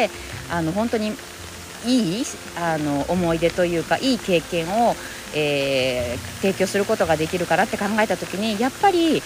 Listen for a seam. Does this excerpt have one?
no; 0 cuts

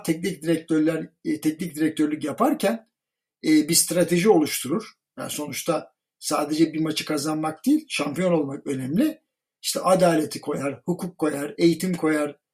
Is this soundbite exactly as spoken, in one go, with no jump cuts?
yes; 0 cuts

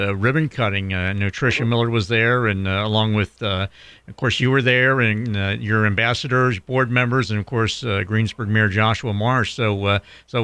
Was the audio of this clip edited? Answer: no; 0 cuts

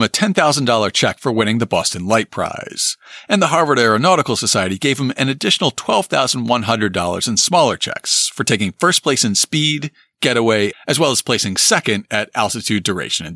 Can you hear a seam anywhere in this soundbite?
yes; 1 cut; at 10.7 s

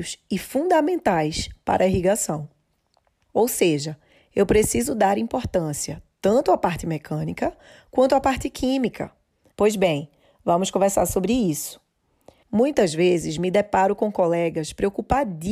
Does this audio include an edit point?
yes; 3 cuts; at 3.3 s, 9.5 s, 12.4 s

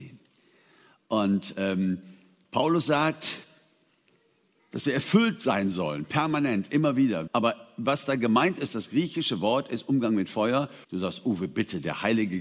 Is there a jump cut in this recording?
yes; 2 cuts; at 7.3 s, 10.8 s

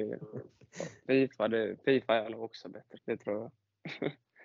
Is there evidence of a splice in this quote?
yes; 1 cut; at 3.0 s

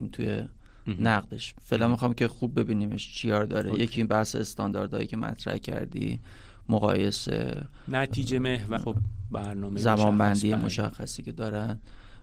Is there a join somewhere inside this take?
yes; 1 cut; at 8.8 s

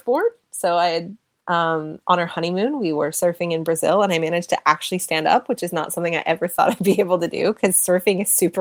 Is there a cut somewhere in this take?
no; 0 cuts

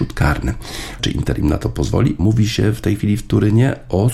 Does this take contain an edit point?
yes; 2 cuts; at 1.0 s, 2.2 s

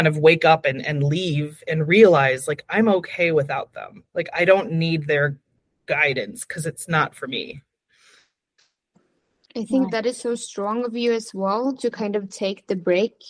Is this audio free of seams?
yes; 0 cuts

